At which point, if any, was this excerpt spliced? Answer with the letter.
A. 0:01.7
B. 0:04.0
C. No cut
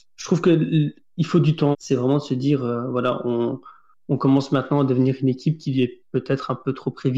A